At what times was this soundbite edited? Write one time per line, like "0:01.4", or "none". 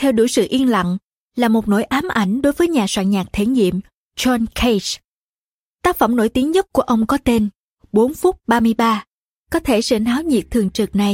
0:05.6
0:09.4